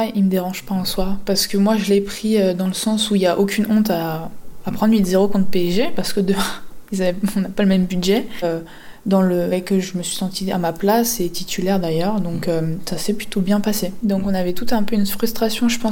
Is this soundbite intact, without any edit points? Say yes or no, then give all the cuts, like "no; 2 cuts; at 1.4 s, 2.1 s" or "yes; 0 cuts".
no; 3 cuts; at 8.4 s, 9.5 s, 14.0 s